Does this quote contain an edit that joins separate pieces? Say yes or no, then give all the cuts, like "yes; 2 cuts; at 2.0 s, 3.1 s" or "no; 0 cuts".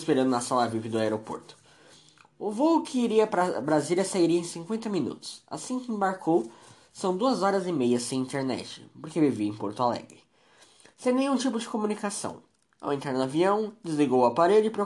no; 0 cuts